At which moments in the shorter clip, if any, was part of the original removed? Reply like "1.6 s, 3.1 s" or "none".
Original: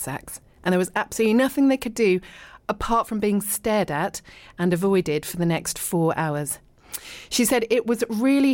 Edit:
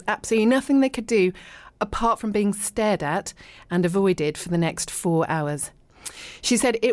none